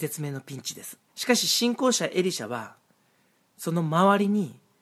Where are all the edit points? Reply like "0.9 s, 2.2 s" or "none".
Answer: 1.1 s